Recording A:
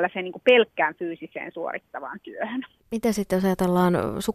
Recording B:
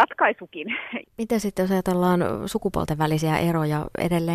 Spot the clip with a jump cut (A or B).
B